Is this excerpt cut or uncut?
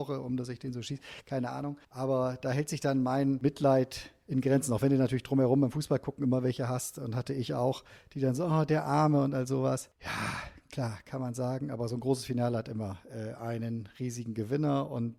cut